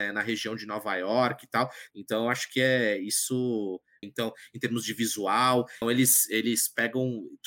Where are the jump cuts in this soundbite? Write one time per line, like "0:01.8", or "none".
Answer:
0:01.9
0:04.0
0:05.8